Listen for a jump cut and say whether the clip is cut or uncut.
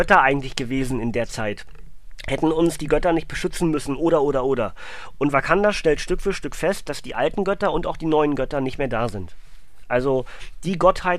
uncut